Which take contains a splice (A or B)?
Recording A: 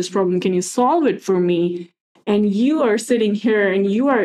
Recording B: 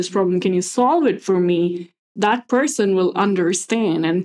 B